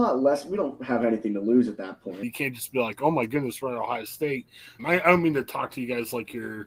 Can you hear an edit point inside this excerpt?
yes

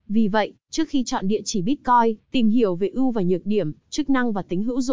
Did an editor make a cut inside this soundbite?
yes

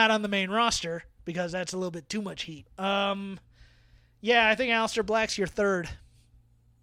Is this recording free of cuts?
no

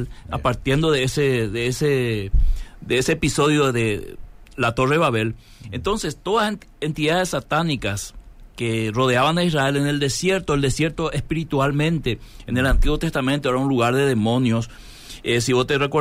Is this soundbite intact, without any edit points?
yes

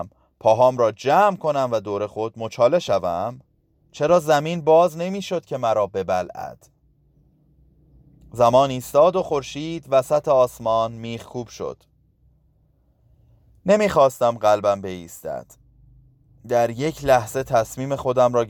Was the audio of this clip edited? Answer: yes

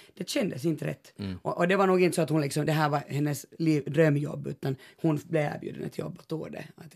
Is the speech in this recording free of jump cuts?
yes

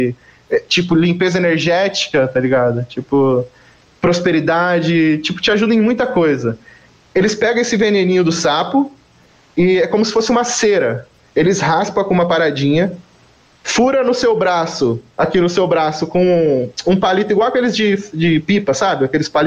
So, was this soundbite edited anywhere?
no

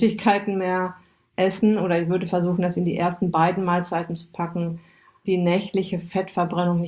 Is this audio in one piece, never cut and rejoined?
no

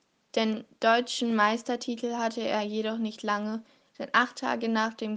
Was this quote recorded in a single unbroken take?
yes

